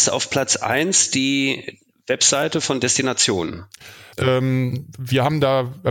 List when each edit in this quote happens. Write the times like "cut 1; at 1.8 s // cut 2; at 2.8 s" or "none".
cut 1; at 4.1 s